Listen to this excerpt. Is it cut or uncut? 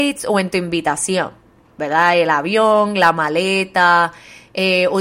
uncut